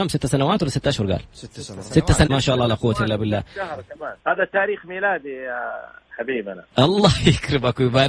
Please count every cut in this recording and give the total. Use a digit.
2